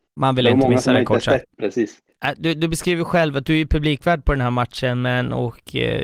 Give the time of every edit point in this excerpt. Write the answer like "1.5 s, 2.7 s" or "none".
1.4 s